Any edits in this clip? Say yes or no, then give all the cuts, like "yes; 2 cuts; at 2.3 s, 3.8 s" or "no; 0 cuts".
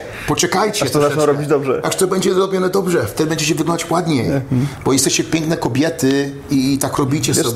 no; 0 cuts